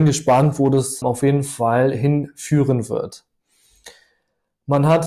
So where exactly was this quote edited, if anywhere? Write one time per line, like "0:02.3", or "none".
0:01.0